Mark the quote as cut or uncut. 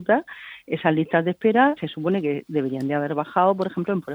cut